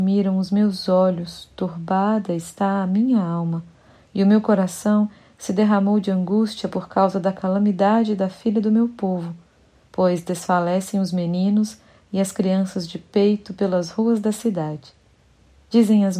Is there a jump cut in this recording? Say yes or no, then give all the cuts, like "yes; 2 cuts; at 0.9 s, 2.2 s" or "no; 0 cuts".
no; 0 cuts